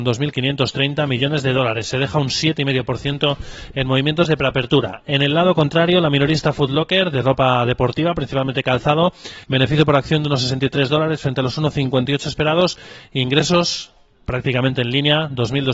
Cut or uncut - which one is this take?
cut